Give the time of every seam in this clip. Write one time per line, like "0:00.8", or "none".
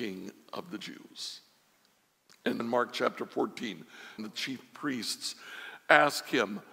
0:02.6
0:04.2

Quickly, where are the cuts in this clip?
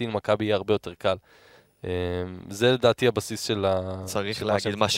none

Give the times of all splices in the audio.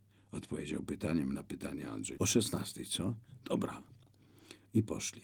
0:02.2

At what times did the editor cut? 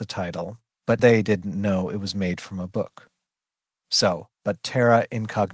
0:01.0
0:04.3

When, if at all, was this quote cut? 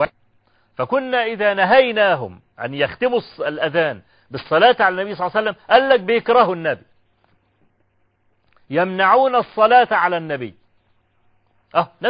none

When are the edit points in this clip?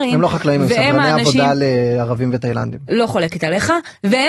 none

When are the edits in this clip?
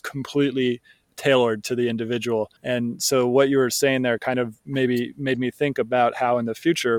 0:02.6

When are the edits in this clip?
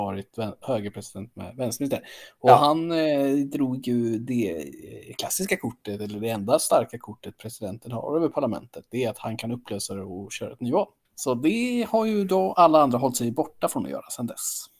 0:11.0

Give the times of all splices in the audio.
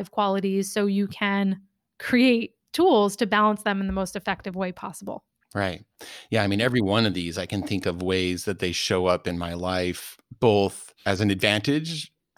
0:11.0

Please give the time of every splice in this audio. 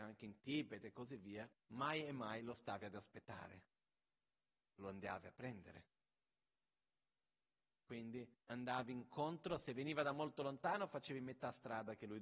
0:01.5
0:08.4

